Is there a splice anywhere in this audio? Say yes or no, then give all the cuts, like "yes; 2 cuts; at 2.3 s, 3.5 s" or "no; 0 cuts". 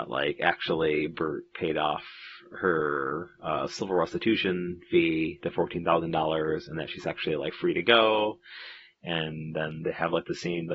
no; 0 cuts